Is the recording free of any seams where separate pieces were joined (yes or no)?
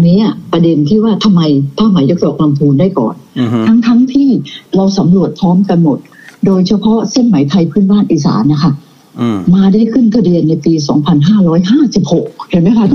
yes